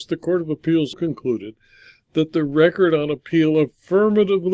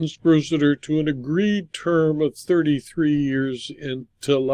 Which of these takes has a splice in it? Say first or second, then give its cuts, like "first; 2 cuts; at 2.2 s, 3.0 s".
first; 1 cut; at 0.9 s